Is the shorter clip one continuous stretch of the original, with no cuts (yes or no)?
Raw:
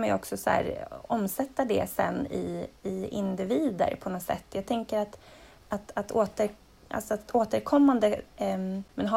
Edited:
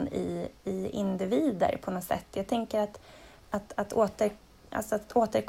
yes